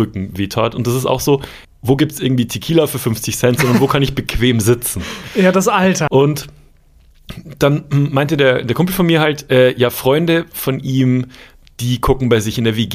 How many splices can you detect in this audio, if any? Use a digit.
2